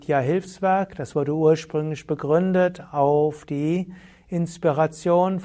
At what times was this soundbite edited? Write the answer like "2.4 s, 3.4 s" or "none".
none